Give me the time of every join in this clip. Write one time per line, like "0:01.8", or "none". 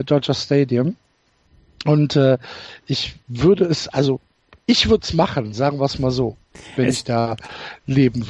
none